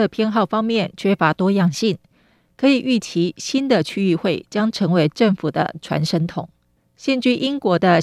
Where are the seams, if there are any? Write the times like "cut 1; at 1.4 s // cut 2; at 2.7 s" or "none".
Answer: none